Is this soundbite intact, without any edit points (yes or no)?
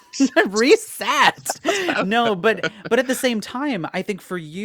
yes